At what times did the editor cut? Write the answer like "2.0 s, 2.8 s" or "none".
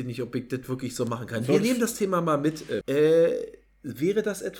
2.8 s